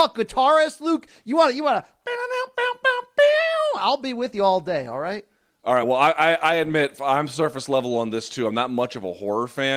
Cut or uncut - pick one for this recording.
uncut